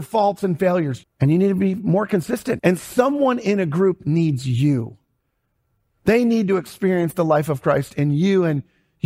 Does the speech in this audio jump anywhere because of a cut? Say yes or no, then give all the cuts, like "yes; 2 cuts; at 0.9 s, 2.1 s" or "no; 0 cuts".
yes; 2 cuts; at 1.0 s, 2.6 s